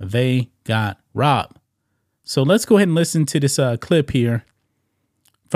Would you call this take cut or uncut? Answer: uncut